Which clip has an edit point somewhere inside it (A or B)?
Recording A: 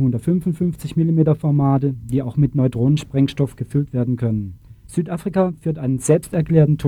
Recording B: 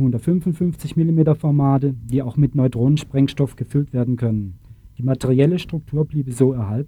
A